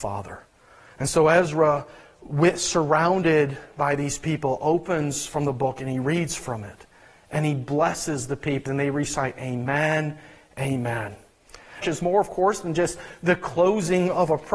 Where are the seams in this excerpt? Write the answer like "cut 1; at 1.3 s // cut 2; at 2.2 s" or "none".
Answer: cut 1; at 8.7 s // cut 2; at 11.8 s

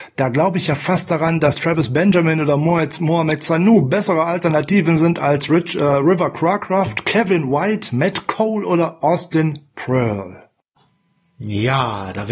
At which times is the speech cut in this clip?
none

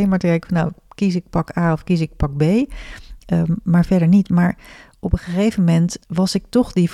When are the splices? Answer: cut 1; at 6.0 s

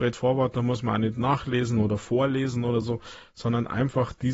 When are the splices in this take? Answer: none

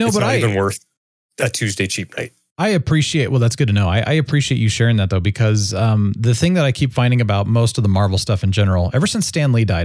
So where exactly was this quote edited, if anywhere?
none

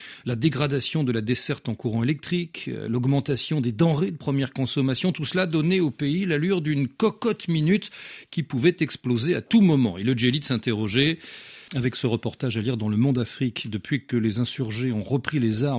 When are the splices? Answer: cut 1; at 11.7 s

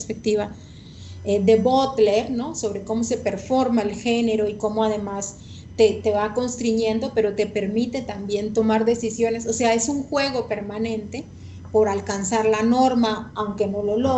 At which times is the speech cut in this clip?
none

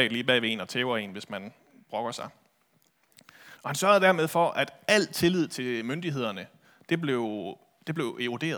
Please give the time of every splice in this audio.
cut 1; at 3.6 s

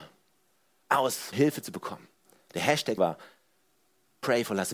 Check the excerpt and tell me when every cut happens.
cut 1; at 1.3 s // cut 2; at 3.0 s

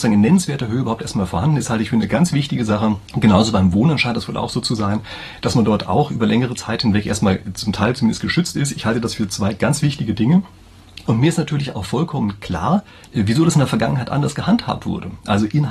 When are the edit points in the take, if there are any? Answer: cut 1; at 3.0 s // cut 2; at 11.0 s

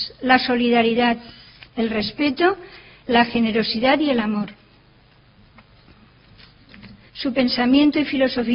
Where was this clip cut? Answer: cut 1; at 7.1 s

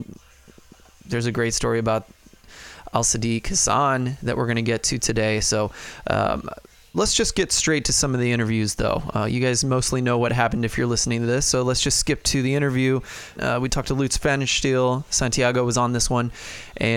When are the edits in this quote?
cut 1; at 13.3 s

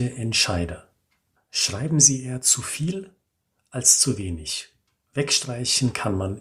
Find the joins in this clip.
cut 1; at 1.4 s

